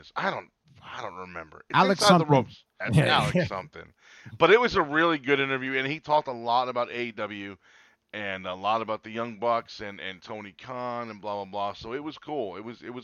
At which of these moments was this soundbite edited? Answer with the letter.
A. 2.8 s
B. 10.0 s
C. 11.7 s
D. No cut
A